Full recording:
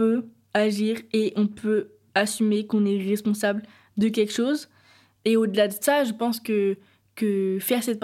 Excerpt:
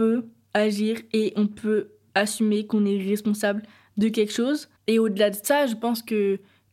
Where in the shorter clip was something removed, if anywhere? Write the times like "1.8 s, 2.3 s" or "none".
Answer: 4.8 s